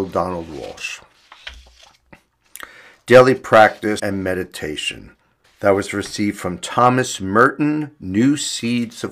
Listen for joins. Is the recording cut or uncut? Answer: cut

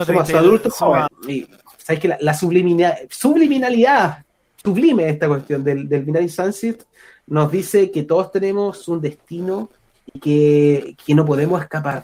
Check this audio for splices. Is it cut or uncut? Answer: cut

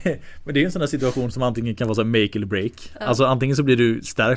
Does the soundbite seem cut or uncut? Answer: uncut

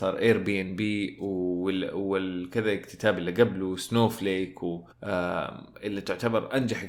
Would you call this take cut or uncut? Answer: cut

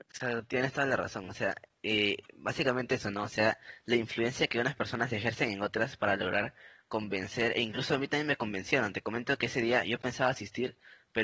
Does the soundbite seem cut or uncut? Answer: uncut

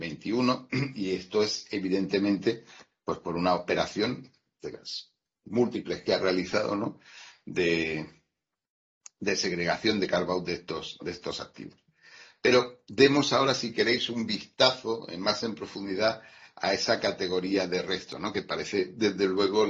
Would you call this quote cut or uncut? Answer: uncut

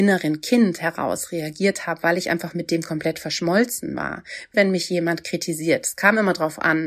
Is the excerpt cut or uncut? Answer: cut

